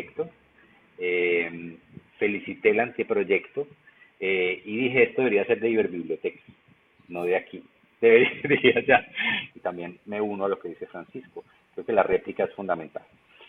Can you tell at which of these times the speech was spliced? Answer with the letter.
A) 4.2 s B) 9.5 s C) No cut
B